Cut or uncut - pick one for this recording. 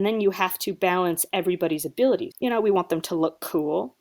cut